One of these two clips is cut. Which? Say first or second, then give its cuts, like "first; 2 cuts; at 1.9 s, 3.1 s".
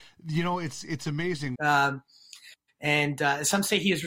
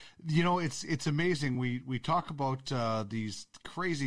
first; 1 cut; at 1.5 s